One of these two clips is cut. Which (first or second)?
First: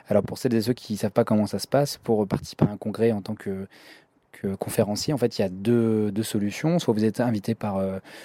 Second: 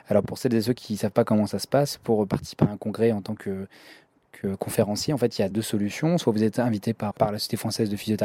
second